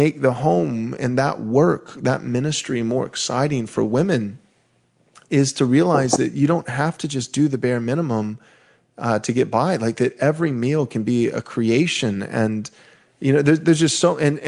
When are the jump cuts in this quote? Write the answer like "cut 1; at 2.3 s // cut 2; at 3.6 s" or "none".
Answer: none